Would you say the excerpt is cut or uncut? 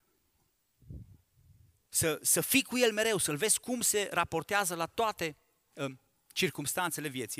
cut